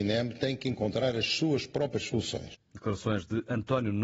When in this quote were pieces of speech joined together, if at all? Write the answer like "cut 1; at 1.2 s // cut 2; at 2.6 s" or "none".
none

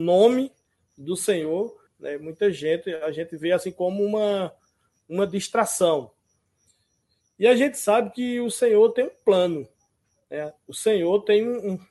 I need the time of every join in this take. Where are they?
cut 1; at 1.9 s

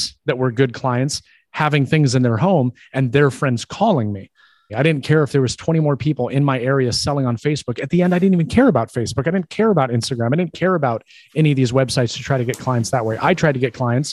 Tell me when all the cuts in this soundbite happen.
cut 1; at 4.7 s

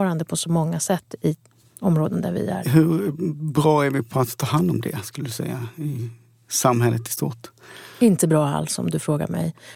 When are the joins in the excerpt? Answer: cut 1; at 2.6 s

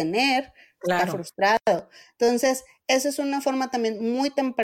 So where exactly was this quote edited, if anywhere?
none

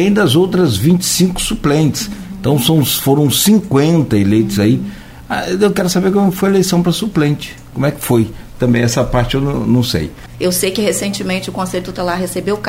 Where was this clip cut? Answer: cut 1; at 10.3 s

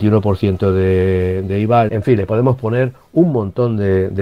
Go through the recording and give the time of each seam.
cut 1; at 1.9 s

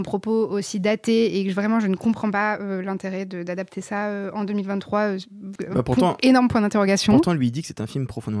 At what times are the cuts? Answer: none

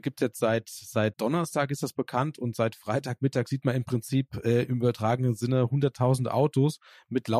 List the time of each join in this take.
cut 1; at 1.1 s

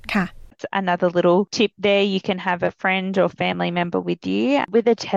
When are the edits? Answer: none

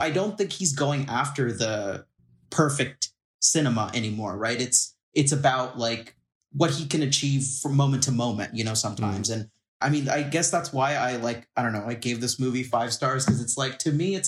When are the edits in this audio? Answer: none

